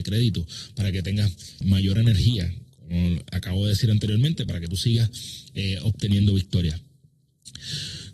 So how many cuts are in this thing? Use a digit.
1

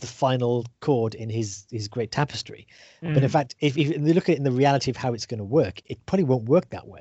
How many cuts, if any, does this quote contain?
0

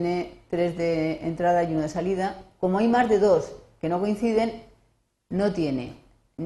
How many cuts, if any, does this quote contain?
0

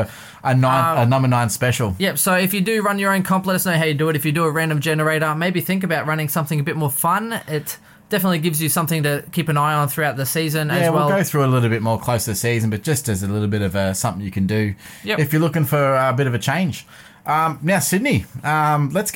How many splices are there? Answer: 0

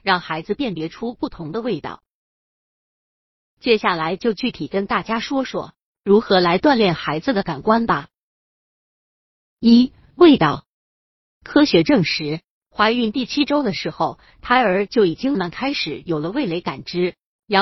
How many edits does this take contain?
1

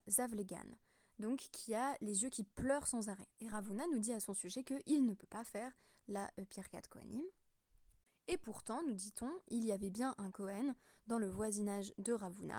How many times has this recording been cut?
1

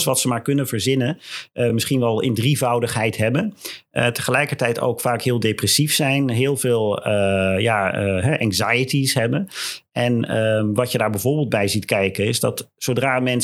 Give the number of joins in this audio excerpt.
0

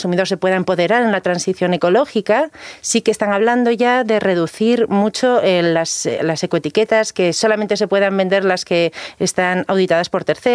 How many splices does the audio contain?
0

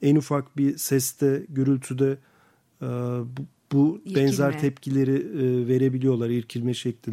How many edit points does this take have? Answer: 0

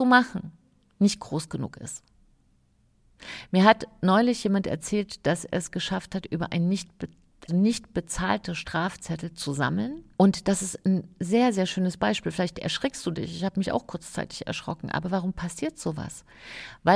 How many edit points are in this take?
2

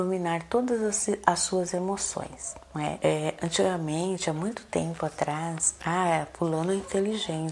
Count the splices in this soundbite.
2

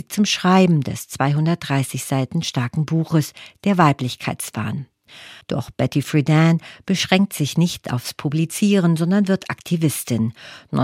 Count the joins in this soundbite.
1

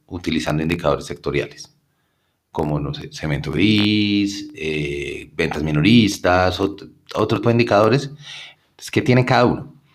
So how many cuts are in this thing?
2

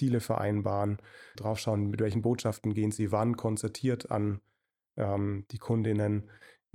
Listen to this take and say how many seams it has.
1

